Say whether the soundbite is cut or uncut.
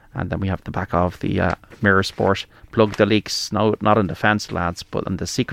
uncut